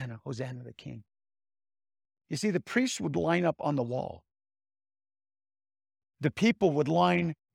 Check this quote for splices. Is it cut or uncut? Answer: cut